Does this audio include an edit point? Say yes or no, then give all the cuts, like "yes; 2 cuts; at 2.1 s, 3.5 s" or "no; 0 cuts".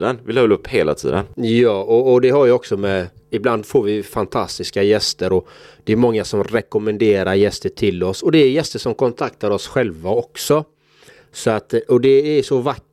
no; 0 cuts